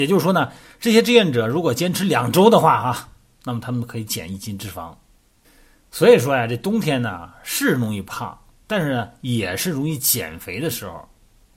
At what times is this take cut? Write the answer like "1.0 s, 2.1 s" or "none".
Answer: none